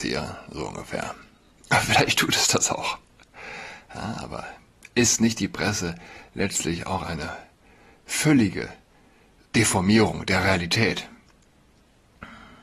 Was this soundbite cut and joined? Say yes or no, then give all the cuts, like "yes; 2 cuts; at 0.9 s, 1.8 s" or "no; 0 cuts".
yes; 1 cut; at 9.5 s